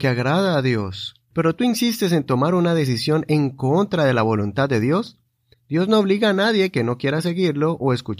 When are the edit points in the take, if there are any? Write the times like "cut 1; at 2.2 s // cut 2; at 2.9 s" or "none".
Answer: cut 1; at 1.3 s // cut 2; at 5.5 s